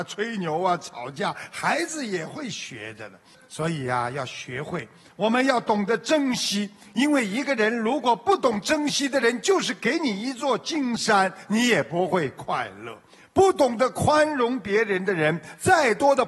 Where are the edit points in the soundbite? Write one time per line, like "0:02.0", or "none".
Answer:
0:03.3

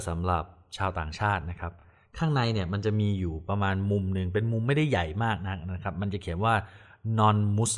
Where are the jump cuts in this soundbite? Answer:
none

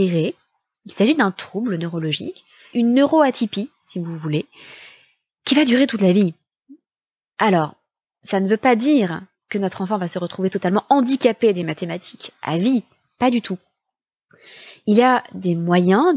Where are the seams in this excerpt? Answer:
0:02.7

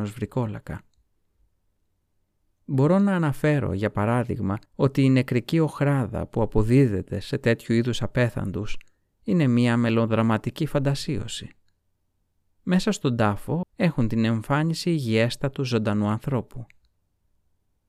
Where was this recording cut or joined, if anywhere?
0:04.7
0:13.6

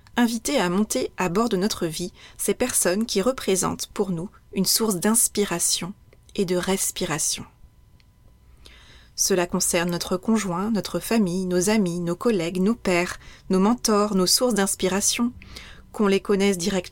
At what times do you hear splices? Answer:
none

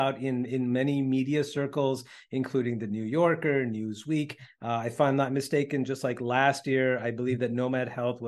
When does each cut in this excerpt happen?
none

